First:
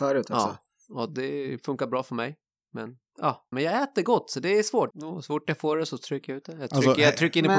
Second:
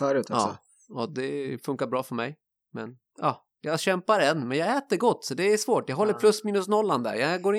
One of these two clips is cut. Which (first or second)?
first